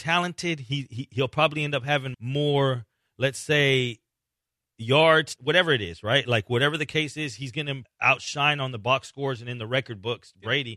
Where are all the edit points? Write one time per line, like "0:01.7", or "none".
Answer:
0:02.1
0:05.4
0:07.8